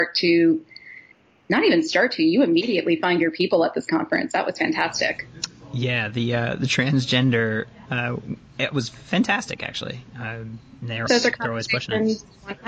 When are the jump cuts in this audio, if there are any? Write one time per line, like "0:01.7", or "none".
0:07.9
0:11.1